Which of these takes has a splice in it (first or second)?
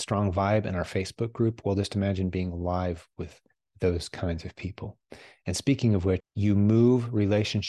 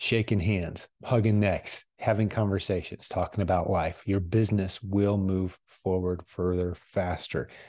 first